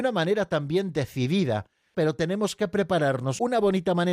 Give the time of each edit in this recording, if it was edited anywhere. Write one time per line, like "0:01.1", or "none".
0:01.9

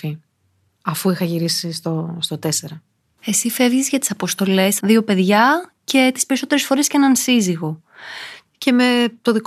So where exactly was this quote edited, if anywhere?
0:04.8
0:08.5

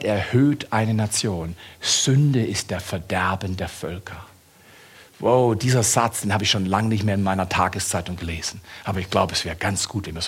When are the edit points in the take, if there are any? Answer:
none

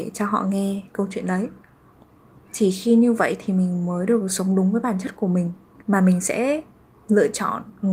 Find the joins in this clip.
0:05.8

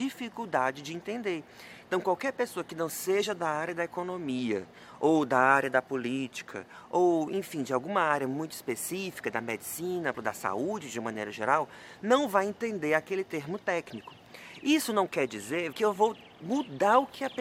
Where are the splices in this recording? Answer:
0:10.1
0:15.7

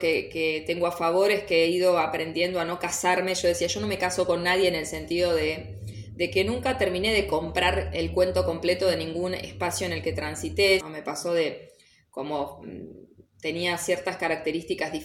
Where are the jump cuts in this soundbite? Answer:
0:10.8

